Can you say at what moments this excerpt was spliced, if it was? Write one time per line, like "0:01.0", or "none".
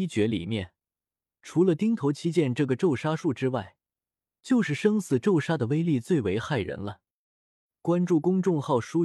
none